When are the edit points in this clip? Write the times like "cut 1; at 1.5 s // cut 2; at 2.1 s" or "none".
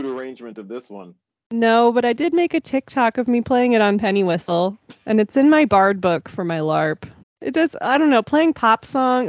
cut 1; at 7.2 s